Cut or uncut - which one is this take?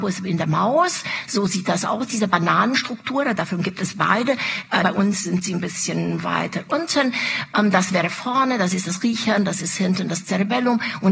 cut